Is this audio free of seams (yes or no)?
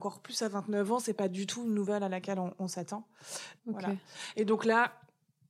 no